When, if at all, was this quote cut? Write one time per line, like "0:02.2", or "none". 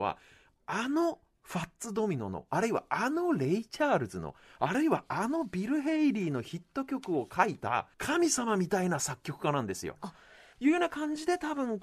0:07.9
0:10.5